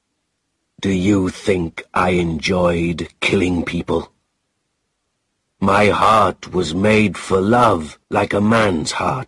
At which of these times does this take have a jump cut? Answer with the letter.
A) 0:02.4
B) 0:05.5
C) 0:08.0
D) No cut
C